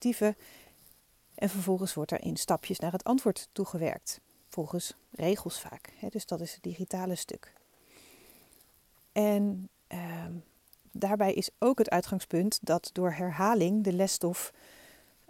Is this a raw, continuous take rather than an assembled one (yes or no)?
yes